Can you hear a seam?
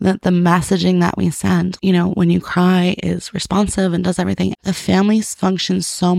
yes; 2 cuts; at 1.8 s, 4.6 s

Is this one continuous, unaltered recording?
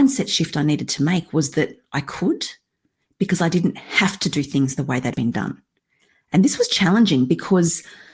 no; 1 cut; at 5.1 s

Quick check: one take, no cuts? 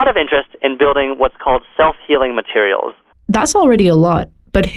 no; 1 cut; at 3.1 s

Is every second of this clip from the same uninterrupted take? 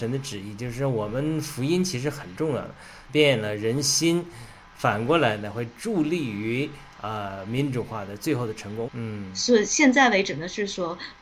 no; 2 cuts; at 3.1 s, 8.9 s

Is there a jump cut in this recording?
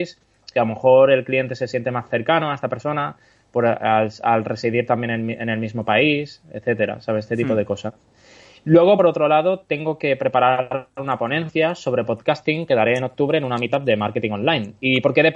no; 0 cuts

